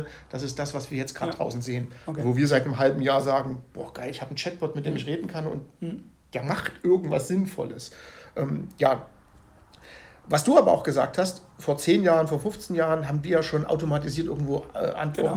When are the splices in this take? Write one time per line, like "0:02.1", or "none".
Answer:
none